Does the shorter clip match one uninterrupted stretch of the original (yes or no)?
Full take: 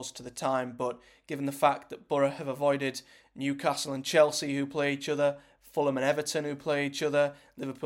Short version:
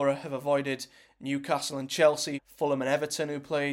no